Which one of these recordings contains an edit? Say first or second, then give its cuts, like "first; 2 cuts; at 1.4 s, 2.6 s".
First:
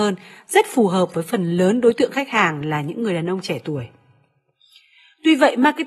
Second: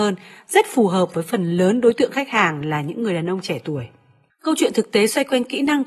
second; 1 cut; at 4.3 s